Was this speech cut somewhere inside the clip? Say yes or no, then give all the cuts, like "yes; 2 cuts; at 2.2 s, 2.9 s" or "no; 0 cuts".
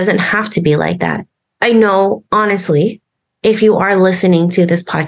no; 0 cuts